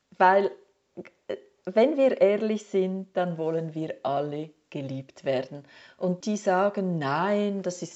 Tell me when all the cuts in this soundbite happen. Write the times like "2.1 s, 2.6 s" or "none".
6.2 s

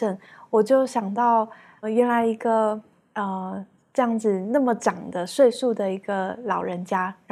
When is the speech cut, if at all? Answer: 1.8 s

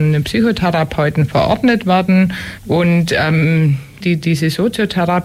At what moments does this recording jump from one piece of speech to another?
2.6 s, 4.0 s

